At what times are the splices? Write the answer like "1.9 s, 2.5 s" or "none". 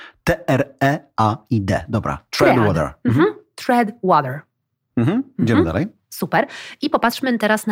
none

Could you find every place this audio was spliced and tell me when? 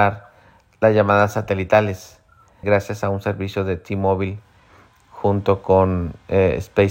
2.6 s

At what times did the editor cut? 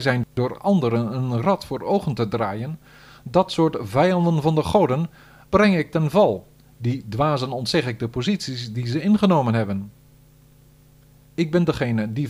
none

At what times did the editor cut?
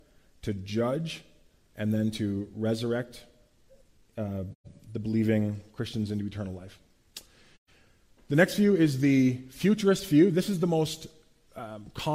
none

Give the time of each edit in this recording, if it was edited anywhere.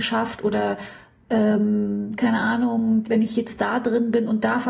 3.0 s

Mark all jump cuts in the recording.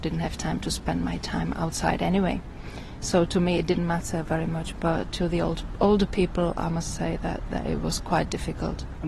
none

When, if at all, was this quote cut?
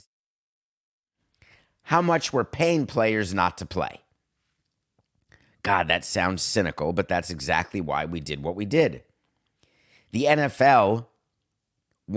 none

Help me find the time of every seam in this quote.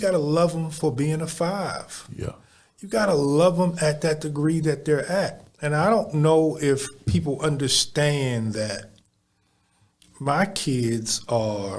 none

